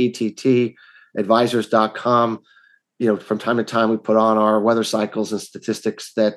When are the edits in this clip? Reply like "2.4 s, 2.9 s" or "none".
none